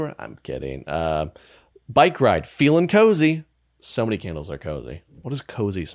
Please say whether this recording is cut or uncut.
uncut